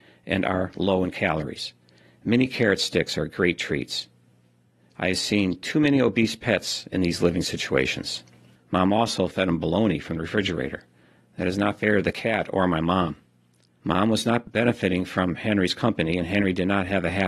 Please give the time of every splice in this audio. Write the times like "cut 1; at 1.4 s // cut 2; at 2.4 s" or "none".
cut 1; at 8.5 s